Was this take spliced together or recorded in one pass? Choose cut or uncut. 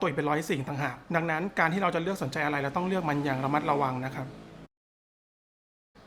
cut